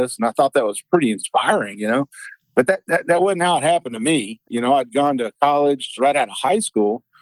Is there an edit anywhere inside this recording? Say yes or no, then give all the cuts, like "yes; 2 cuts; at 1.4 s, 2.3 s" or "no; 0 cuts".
yes; 2 cuts; at 4.4 s, 6.0 s